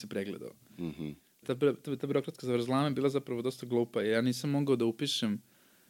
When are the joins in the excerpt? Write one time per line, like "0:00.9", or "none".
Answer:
0:01.4